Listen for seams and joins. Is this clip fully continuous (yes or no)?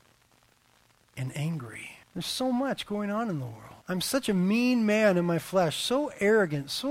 no